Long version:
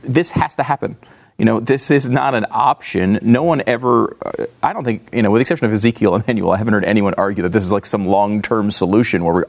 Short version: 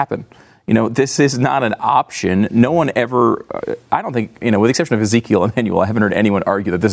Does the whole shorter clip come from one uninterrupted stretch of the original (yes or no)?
yes